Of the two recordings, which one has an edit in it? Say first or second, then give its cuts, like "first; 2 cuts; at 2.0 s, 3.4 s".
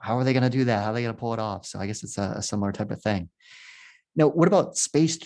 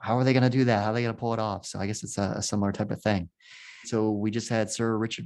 second; 1 cut; at 3.8 s